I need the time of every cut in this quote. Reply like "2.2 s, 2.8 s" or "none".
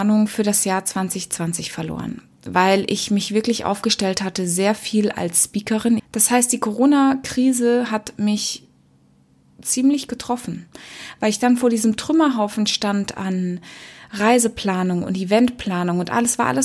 6.0 s